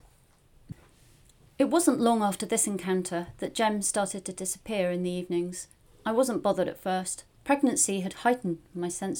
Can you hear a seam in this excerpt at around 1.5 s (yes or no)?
no